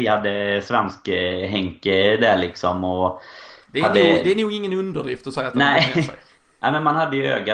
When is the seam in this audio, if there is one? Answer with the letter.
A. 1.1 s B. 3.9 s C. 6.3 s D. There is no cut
D